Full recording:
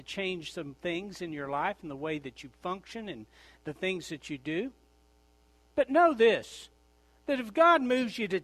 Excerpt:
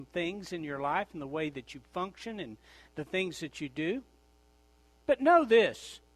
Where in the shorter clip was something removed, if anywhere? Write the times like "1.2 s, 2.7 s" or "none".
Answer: none